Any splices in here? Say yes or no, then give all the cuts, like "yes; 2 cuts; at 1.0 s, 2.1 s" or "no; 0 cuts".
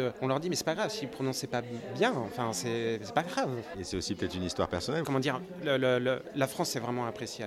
yes; 2 cuts; at 3.7 s, 5.0 s